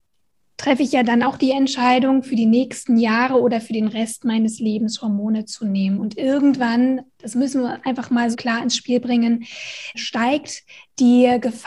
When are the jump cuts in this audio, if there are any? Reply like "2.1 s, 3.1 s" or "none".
8.3 s, 9.9 s